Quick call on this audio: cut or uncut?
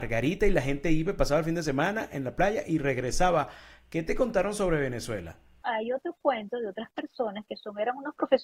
cut